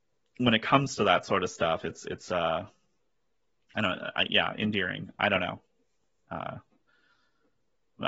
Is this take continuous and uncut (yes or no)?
yes